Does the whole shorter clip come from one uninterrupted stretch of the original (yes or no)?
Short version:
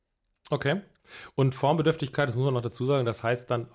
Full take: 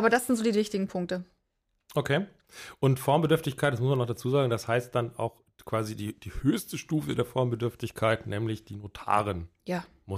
yes